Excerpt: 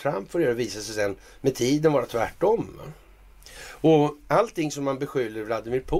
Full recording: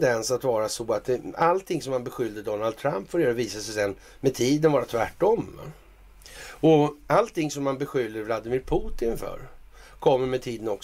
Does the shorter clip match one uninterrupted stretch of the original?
yes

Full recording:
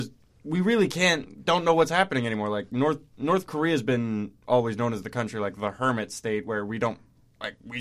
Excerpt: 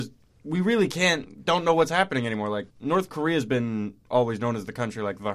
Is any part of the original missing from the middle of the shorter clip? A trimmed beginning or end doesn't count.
yes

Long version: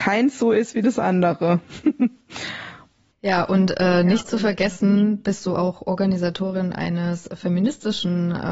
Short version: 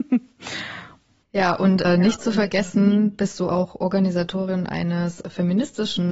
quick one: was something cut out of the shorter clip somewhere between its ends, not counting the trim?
yes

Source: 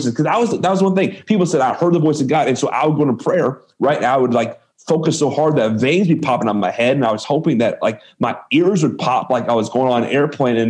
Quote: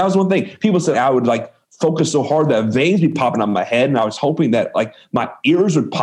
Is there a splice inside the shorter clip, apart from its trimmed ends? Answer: yes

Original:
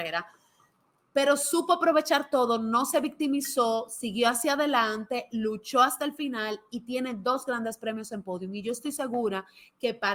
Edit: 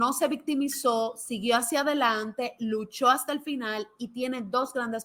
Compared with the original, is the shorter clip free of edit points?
yes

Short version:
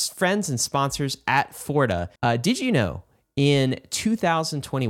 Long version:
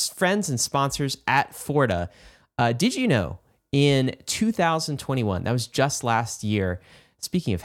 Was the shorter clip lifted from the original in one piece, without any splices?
no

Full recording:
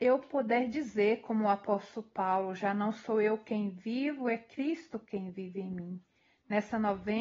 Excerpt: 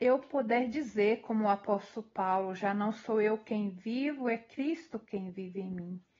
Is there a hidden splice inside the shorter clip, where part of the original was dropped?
no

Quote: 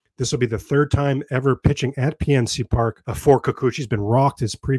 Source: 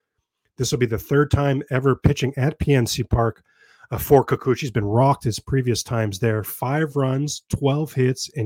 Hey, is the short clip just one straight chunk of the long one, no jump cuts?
no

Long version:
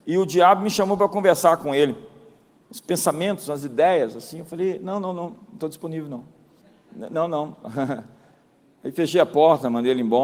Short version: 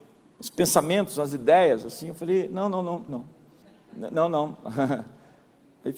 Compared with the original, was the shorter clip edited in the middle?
yes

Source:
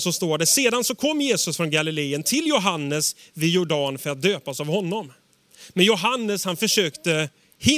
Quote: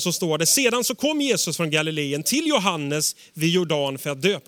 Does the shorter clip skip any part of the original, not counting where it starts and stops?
no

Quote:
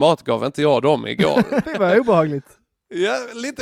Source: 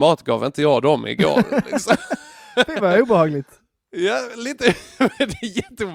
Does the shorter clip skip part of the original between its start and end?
yes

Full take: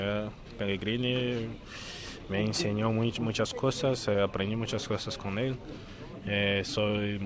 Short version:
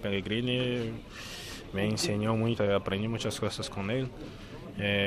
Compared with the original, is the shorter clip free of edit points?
no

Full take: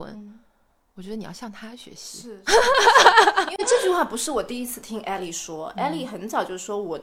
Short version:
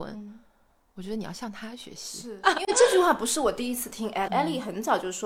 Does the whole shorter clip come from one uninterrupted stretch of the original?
no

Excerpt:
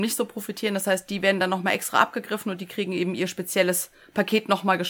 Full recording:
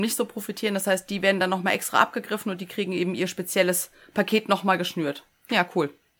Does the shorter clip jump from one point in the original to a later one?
no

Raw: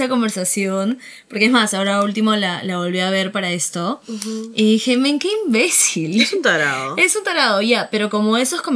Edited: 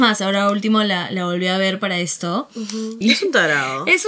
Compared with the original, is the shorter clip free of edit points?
no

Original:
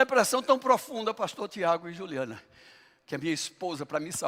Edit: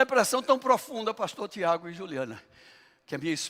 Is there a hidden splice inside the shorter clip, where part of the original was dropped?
no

